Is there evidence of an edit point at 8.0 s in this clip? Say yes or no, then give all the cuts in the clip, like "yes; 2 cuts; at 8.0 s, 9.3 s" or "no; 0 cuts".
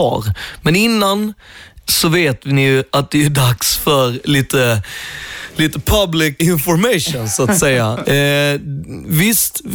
yes; 2 cuts; at 6.4 s, 8.0 s